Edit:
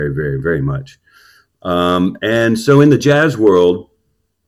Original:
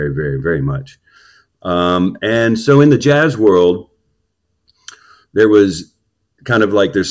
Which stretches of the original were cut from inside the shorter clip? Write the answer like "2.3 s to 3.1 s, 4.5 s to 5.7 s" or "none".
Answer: none